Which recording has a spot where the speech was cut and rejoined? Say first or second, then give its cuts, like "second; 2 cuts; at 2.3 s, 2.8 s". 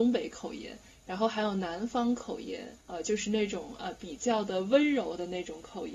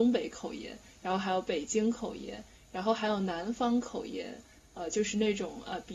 first; 2 cuts; at 0.9 s, 2.8 s